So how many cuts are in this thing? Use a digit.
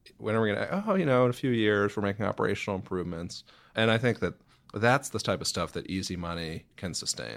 0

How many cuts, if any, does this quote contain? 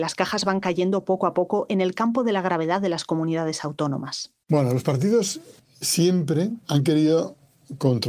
2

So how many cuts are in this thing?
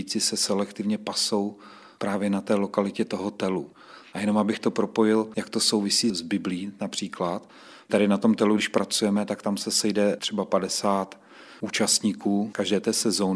0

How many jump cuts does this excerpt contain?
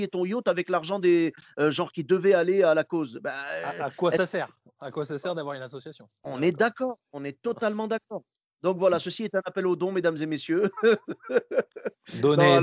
0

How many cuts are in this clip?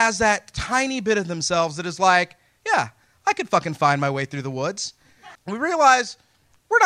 1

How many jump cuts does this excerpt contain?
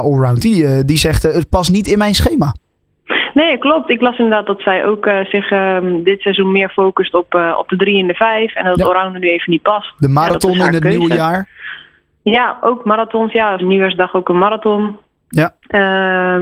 1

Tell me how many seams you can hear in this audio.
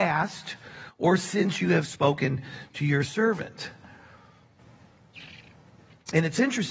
0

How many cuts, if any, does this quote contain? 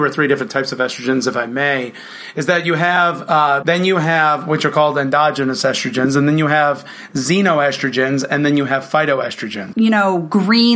2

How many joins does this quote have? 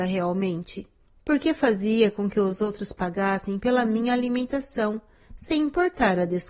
0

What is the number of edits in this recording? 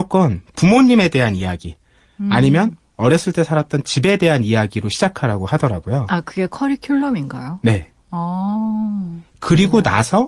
0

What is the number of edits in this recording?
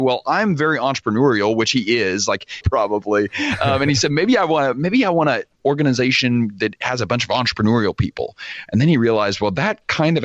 1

